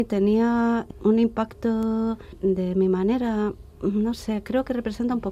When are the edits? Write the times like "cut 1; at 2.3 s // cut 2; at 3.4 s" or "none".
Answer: none